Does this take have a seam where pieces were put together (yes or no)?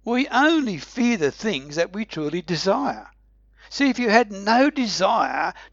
no